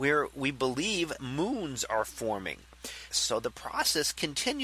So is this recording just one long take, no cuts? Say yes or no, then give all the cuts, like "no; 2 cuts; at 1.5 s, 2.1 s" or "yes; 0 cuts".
no; 2 cuts; at 1.2 s, 3.1 s